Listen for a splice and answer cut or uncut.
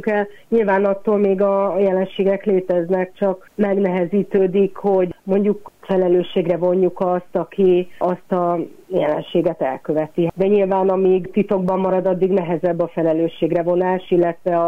cut